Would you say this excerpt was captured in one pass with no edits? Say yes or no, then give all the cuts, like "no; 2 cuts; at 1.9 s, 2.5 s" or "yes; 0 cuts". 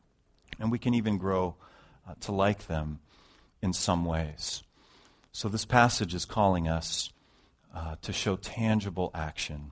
yes; 0 cuts